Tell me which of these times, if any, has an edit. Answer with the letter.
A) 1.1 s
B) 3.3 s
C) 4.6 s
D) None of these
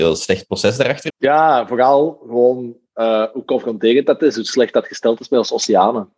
A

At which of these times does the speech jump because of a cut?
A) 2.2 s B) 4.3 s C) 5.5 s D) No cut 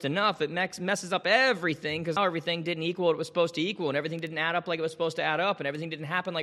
A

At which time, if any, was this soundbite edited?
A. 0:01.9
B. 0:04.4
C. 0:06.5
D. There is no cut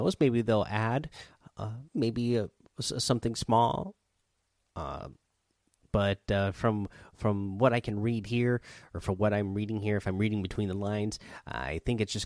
A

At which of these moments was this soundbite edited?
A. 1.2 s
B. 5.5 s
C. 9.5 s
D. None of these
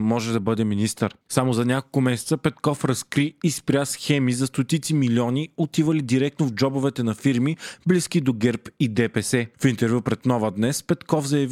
C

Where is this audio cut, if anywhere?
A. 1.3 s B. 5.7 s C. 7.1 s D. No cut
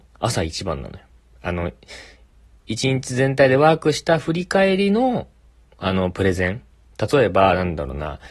A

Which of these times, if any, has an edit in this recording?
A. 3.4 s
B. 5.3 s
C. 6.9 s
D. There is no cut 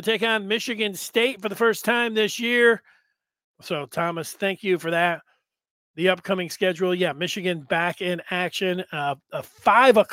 A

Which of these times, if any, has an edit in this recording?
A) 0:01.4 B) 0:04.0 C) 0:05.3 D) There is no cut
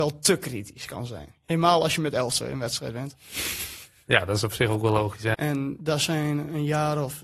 C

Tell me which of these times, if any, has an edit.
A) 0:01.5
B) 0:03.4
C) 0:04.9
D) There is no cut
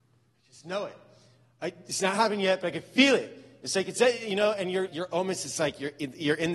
C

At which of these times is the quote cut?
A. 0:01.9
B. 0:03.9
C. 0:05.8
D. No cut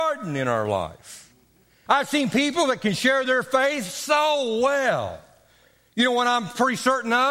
A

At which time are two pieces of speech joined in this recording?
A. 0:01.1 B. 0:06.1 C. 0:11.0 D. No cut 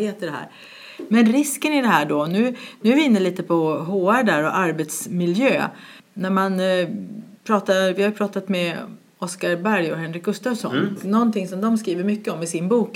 C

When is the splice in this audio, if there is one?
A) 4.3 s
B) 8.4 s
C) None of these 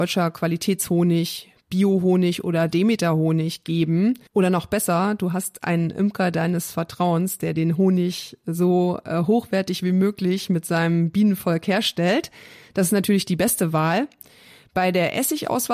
A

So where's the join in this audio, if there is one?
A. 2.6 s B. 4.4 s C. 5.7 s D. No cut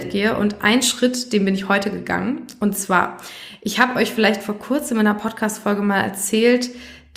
D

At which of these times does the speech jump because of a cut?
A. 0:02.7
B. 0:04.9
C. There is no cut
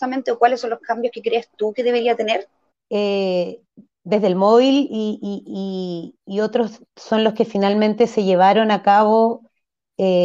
A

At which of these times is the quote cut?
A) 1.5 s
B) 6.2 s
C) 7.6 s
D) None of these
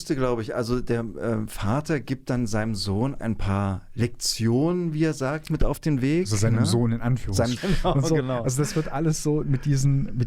C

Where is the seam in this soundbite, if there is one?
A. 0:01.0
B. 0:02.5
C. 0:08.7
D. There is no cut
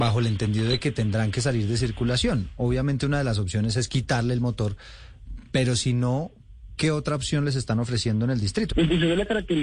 C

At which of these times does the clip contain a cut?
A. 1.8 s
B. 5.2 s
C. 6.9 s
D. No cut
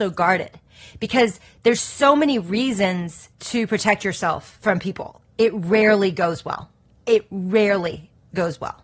B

